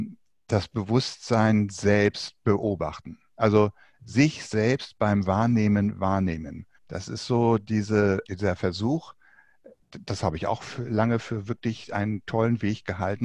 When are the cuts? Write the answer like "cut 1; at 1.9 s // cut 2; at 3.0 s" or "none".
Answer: cut 1; at 6.7 s // cut 2; at 8.2 s